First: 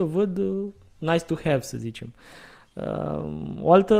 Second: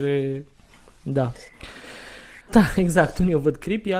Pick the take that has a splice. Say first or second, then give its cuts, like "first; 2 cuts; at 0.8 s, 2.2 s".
second; 1 cut; at 2.5 s